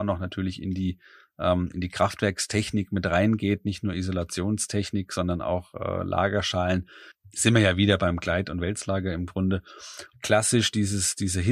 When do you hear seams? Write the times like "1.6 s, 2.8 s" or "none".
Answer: 10.1 s